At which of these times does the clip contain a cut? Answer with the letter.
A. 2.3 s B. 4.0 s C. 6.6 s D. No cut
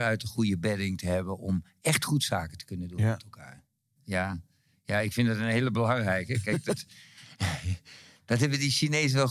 B